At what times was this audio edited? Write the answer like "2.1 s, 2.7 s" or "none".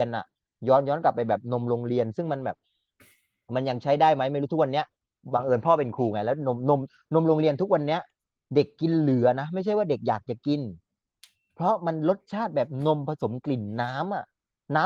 none